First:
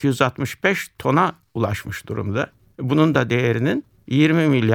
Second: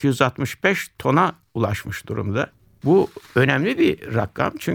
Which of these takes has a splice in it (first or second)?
second